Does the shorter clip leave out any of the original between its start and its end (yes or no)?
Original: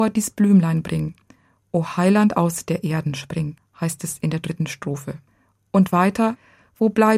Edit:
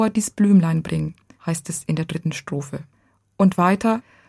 yes